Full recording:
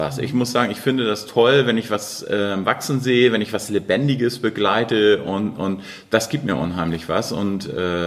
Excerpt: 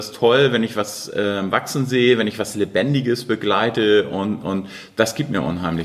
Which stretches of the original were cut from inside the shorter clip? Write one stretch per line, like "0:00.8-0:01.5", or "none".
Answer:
none